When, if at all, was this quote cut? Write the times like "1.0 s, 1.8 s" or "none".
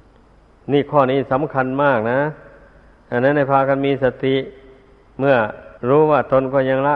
5.8 s